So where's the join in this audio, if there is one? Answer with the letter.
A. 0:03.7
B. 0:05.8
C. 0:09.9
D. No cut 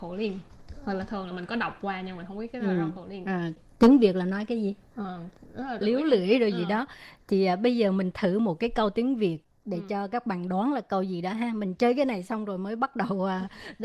B